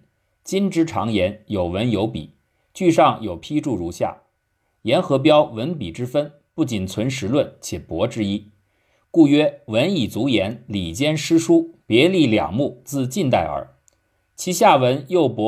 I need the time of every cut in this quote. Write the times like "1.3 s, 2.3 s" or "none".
none